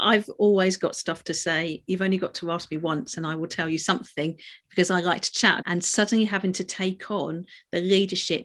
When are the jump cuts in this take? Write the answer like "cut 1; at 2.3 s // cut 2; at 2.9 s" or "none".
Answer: cut 1; at 5.6 s